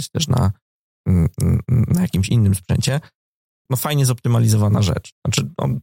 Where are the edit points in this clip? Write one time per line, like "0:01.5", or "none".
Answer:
0:03.7